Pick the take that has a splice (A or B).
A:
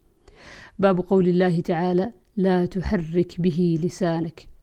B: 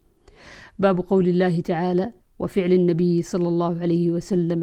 B